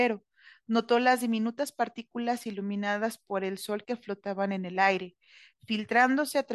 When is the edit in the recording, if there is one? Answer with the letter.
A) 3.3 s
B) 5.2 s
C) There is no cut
C